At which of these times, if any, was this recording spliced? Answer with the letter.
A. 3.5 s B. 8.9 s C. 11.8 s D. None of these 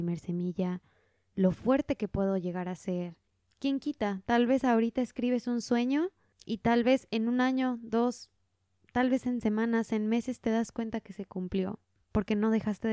A